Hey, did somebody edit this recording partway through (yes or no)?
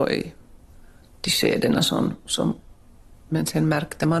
yes